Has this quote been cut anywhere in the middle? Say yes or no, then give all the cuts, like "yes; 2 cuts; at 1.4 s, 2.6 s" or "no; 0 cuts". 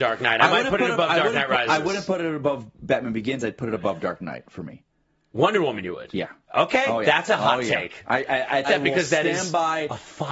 yes; 1 cut; at 8.6 s